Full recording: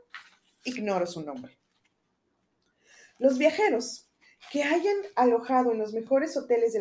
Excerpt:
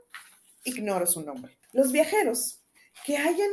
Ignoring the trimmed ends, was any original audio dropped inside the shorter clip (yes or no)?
yes